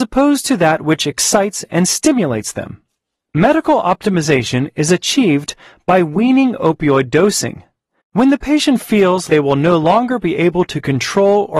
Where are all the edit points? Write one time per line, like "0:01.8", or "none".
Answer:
0:03.3
0:08.0
0:09.3